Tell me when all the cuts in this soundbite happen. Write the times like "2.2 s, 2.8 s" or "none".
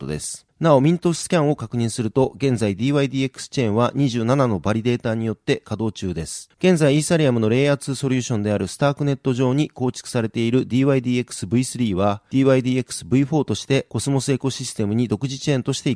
6.5 s